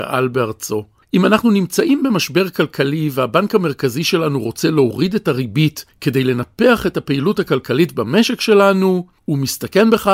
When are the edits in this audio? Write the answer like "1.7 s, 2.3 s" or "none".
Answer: none